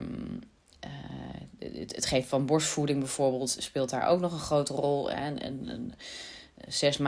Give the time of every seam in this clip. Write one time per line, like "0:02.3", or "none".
none